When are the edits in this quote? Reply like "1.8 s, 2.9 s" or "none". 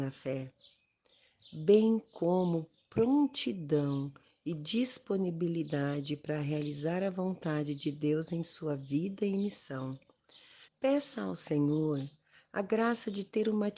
10.6 s